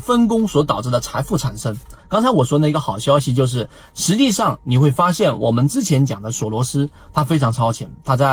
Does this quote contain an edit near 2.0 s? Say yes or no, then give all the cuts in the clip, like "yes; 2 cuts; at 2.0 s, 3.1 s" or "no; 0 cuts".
yes; 1 cut; at 2.0 s